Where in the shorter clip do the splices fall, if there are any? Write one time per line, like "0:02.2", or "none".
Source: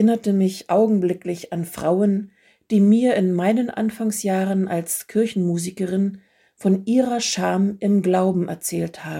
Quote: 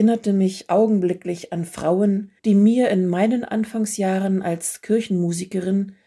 0:02.4